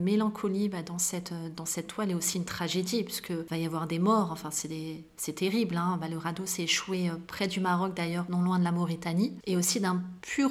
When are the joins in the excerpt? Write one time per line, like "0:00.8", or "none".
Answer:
none